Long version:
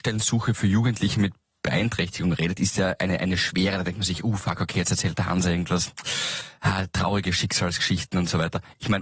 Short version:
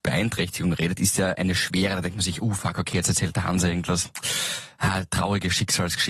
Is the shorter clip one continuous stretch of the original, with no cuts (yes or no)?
no